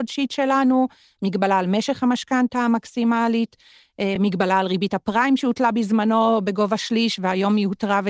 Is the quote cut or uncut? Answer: uncut